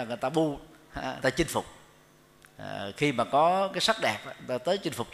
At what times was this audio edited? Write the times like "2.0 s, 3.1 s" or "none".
none